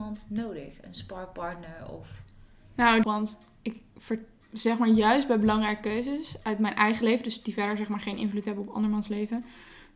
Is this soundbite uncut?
no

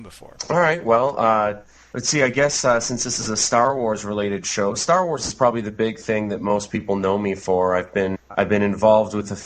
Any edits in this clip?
yes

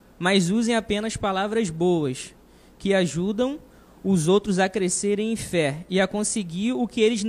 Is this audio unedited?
yes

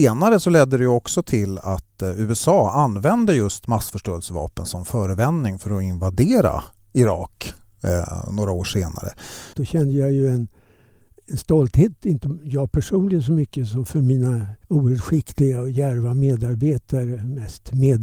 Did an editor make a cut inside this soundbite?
yes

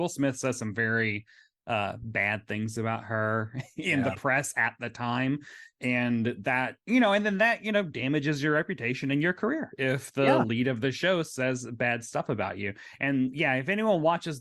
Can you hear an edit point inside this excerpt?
no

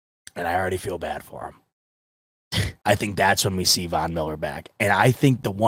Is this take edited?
yes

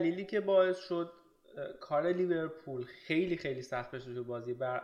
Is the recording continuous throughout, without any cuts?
yes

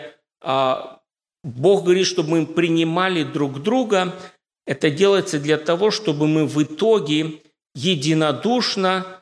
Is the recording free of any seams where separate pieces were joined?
yes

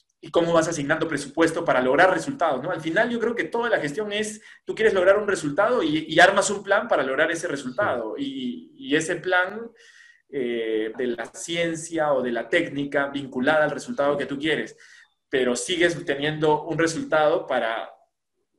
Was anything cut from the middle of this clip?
yes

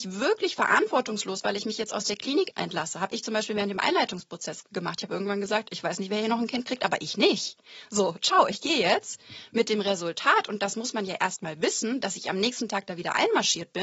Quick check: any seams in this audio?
no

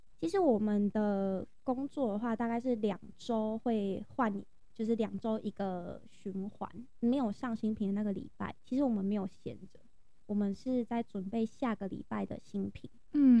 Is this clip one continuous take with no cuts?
no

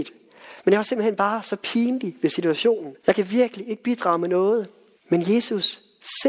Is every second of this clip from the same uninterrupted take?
no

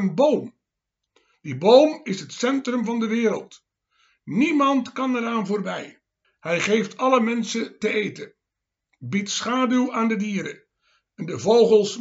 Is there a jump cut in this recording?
yes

